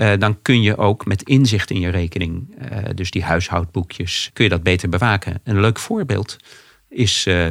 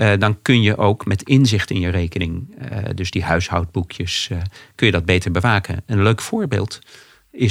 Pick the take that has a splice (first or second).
first